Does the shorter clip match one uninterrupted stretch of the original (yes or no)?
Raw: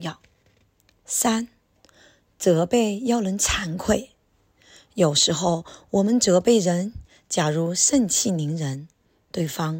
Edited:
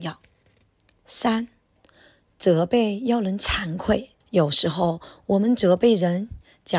no